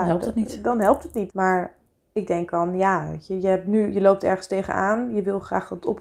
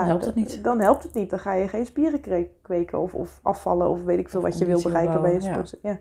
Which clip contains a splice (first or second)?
first